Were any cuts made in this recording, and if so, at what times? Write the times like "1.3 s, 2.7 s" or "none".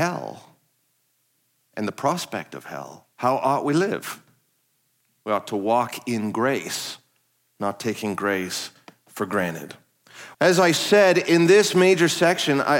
3.1 s, 10.3 s

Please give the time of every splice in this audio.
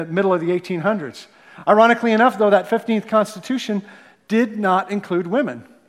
none

